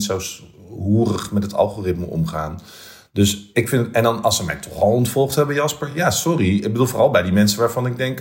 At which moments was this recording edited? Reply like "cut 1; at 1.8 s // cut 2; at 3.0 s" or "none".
none